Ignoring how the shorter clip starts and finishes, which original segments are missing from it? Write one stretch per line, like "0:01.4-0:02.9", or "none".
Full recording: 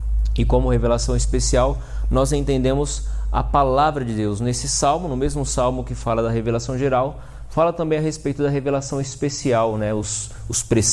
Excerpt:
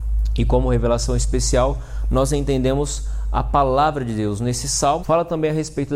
0:05.0-0:07.5